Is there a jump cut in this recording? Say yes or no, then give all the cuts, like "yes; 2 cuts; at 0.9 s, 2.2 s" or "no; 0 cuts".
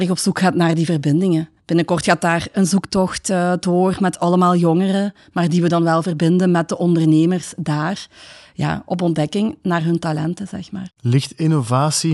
no; 0 cuts